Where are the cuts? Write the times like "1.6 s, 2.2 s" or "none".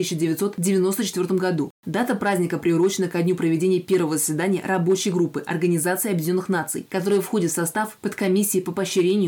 1.7 s